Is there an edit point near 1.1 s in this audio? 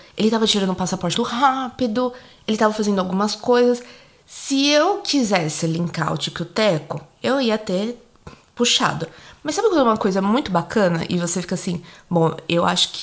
yes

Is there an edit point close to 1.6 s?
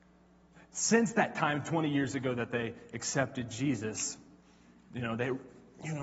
no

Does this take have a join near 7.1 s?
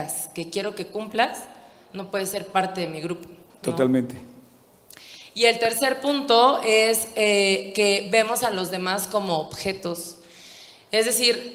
no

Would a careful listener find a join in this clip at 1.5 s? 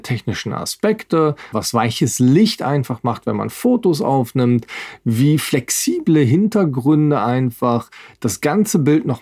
yes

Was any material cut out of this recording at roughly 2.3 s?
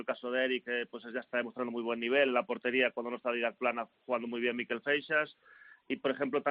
no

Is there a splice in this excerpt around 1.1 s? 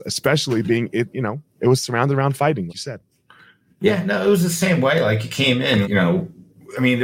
no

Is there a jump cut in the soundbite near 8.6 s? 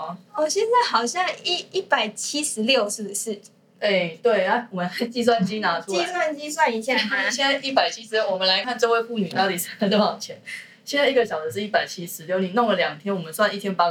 yes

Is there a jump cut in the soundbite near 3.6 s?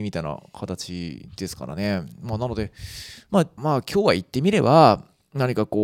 yes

